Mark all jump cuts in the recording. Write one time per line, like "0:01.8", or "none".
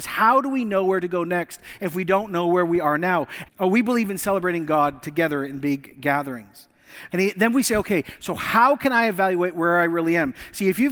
0:03.4
0:07.1